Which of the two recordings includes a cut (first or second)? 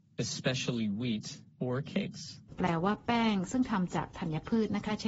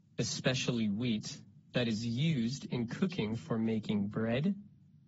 first